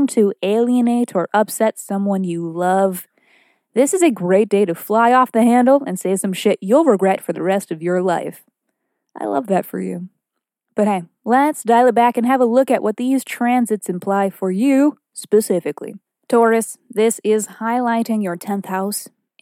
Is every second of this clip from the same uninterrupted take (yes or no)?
yes